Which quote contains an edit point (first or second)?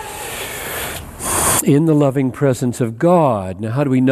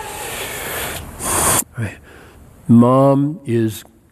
second